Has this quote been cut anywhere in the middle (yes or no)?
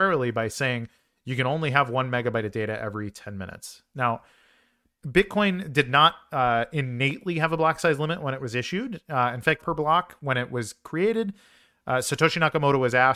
yes